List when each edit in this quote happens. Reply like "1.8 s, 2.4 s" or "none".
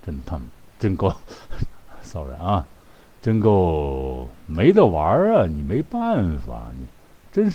none